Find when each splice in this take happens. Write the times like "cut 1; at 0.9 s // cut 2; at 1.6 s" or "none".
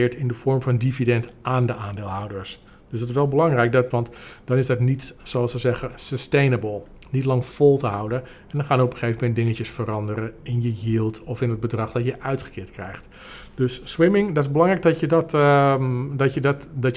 cut 1; at 3.9 s